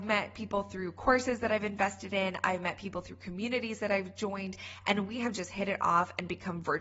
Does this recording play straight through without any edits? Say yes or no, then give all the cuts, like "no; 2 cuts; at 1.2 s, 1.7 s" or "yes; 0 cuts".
yes; 0 cuts